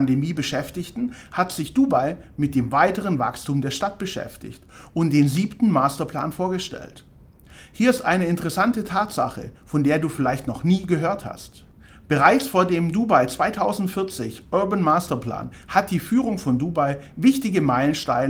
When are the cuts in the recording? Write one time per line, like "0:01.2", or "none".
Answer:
none